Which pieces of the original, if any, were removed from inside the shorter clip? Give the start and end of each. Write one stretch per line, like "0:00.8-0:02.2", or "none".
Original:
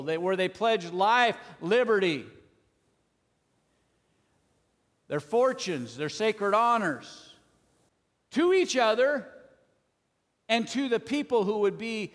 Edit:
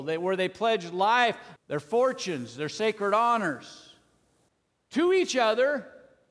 0:01.6-0:05.0